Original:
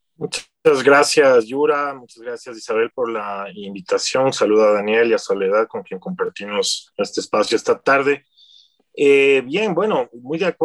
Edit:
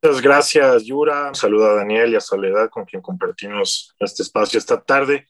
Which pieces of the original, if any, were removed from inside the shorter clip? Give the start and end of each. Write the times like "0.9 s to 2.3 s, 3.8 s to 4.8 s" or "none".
2.0 s to 4.3 s